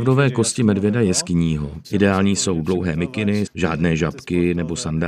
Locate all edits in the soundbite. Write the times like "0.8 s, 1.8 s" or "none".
1.8 s, 3.5 s